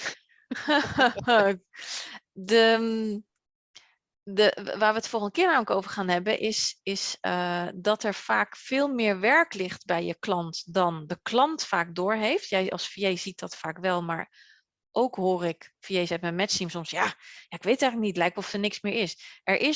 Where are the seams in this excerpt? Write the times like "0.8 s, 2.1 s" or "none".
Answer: none